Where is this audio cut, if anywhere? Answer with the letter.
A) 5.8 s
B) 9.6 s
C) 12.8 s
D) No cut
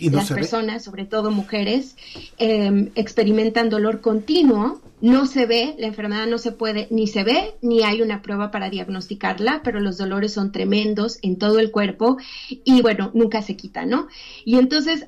D